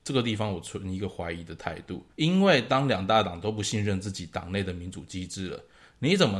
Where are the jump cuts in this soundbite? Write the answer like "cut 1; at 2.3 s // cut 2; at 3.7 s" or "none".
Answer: cut 1; at 2.1 s